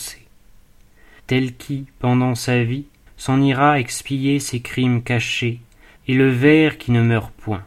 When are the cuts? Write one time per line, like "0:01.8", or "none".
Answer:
0:01.2
0:03.1
0:06.0

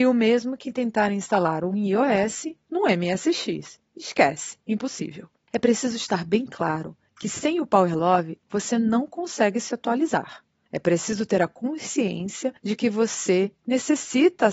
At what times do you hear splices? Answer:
none

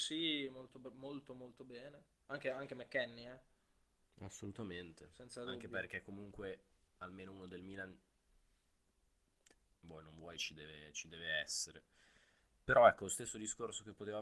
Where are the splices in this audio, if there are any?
none

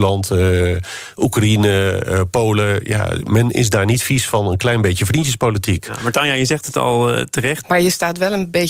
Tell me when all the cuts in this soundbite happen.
0:07.6

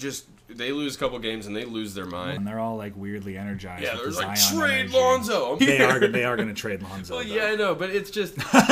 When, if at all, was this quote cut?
0:02.4
0:05.6

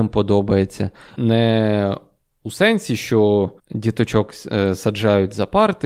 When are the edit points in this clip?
0:01.2
0:03.6

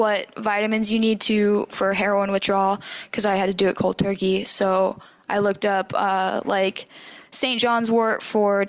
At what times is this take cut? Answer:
none

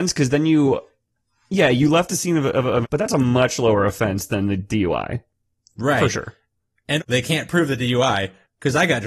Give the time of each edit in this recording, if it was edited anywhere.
0:02.8
0:07.0

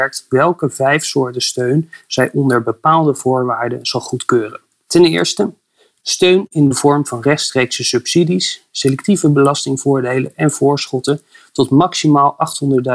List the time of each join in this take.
0:04.9

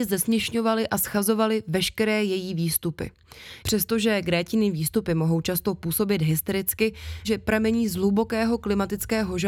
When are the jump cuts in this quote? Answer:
0:03.6
0:07.2

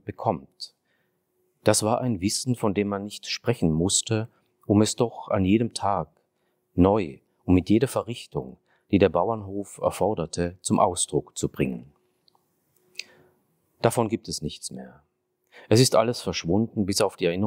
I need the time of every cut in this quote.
none

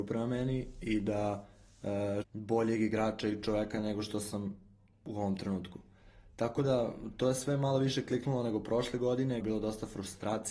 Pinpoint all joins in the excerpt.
0:02.2
0:09.4

